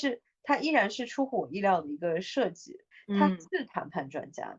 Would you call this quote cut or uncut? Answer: uncut